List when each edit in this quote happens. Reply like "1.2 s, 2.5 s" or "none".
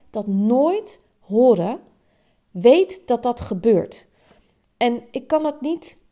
none